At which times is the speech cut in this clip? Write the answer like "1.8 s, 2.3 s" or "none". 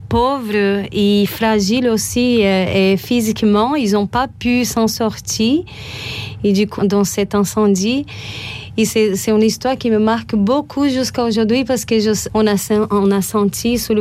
6.8 s, 12.3 s